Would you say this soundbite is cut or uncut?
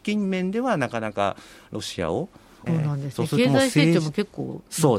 cut